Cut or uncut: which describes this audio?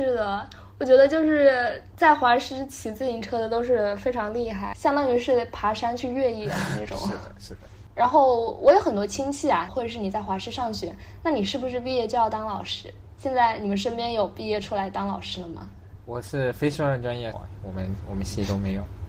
cut